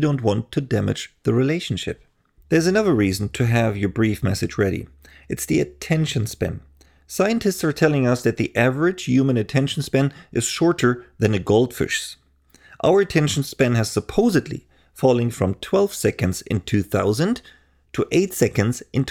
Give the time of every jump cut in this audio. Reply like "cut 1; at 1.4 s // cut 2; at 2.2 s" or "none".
cut 1; at 2.4 s